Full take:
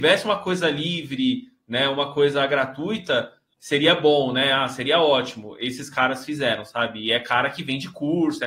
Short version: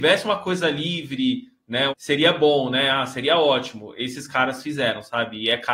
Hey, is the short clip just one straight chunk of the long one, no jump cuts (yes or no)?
no